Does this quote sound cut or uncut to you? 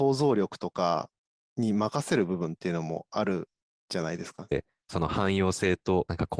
cut